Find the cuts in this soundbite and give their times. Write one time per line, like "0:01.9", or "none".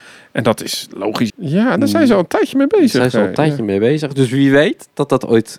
0:01.3